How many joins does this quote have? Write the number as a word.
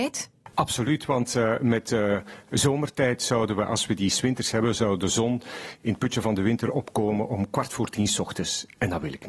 zero